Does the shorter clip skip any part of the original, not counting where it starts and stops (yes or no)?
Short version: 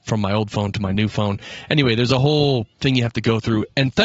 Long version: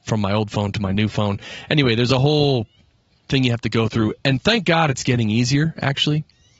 yes